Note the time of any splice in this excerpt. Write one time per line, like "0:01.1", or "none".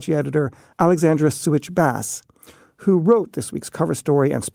none